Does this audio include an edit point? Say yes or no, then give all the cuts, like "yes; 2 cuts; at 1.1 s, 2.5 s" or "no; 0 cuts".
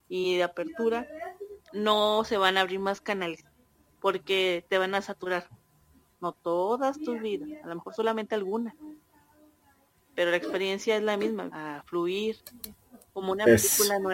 yes; 2 cuts; at 6.1 s, 11.5 s